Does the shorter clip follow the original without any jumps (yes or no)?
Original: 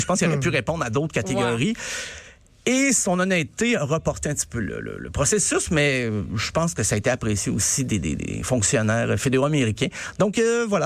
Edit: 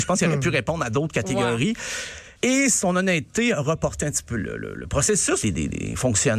no